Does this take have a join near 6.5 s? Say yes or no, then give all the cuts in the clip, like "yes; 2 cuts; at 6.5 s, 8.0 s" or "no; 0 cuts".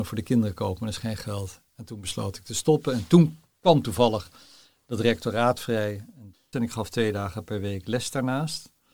yes; 2 cuts; at 1.6 s, 6.5 s